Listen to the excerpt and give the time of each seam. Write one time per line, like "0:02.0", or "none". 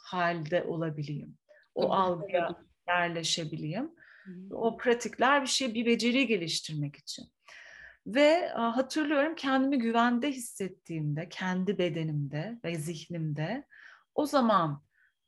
none